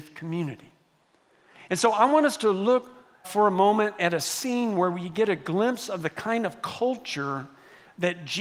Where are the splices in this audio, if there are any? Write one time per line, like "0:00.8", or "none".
0:03.2